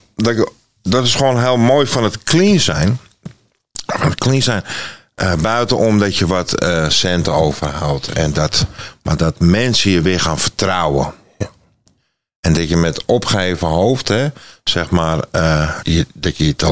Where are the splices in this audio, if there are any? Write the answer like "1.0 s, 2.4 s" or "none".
15.8 s

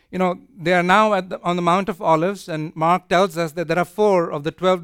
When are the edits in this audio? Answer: none

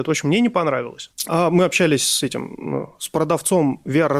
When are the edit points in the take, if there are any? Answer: 1.3 s

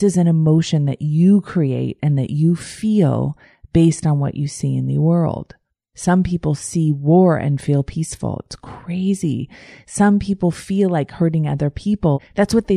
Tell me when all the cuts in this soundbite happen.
none

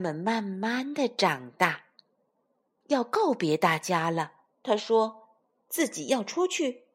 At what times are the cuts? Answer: 2.8 s, 4.5 s

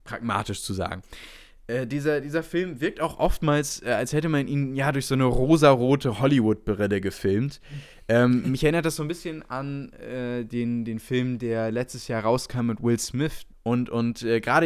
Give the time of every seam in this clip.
13.5 s

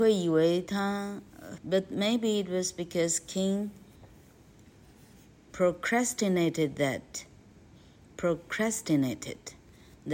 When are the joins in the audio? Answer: 1.6 s

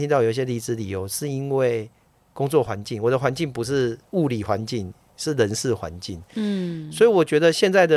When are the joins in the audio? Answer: none

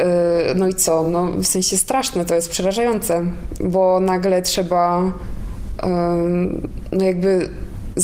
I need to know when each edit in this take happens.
none

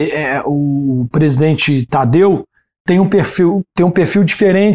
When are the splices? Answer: none

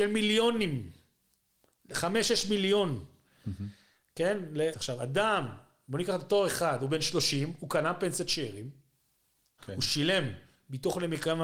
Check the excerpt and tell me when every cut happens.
4.7 s, 9.6 s

